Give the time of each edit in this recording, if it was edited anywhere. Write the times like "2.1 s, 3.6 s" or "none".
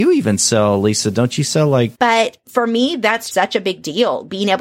1.9 s, 3.3 s